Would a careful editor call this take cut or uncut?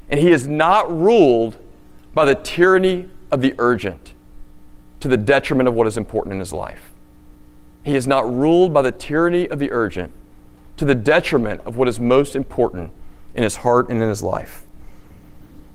uncut